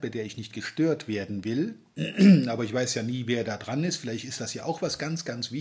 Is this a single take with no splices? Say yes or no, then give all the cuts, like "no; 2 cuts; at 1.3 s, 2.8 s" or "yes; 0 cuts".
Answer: yes; 0 cuts